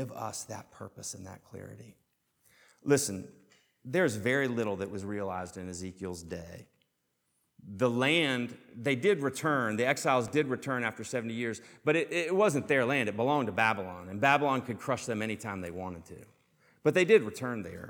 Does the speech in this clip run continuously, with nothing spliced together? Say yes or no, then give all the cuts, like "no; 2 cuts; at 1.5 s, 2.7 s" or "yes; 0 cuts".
yes; 0 cuts